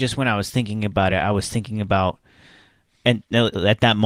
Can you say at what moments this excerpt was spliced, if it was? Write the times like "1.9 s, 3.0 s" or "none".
none